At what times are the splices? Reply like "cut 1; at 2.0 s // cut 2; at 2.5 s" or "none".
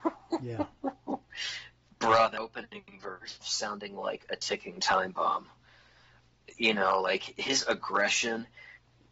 cut 1; at 3.4 s

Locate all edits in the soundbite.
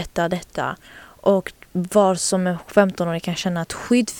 none

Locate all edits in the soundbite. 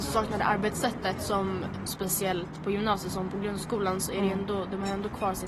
cut 1; at 1.9 s

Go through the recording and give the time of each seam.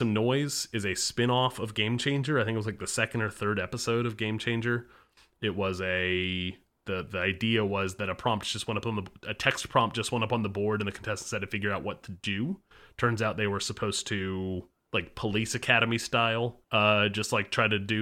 cut 1; at 14.9 s // cut 2; at 16.6 s

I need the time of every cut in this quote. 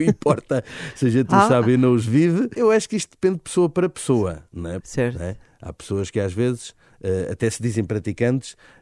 cut 1; at 2.5 s // cut 2; at 4.8 s

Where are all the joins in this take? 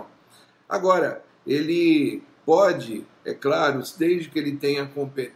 cut 1; at 1.3 s

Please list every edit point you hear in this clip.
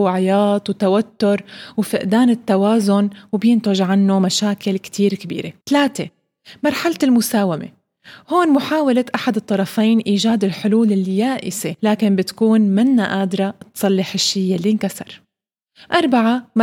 cut 1; at 5.6 s // cut 2; at 11.8 s

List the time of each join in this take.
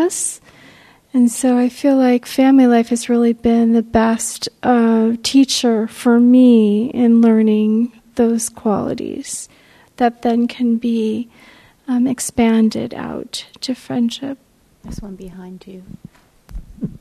cut 1; at 14.8 s

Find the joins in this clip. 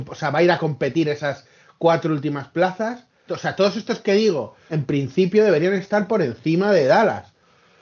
cut 1; at 3.3 s // cut 2; at 4.7 s

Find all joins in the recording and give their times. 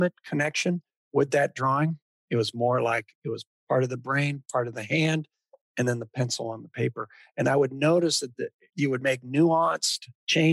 cut 1; at 8.7 s

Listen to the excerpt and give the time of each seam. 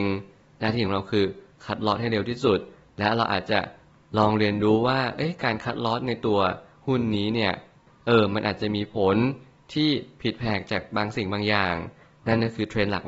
none

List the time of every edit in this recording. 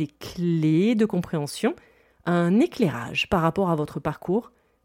none

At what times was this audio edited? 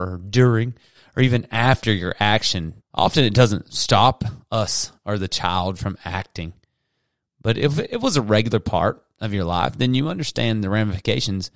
cut 1; at 2.8 s

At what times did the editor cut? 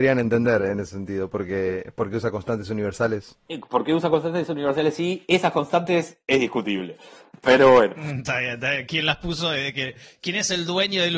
none

